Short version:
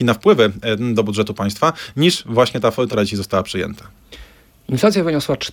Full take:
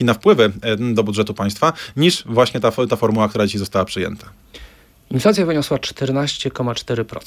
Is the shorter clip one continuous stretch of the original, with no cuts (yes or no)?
no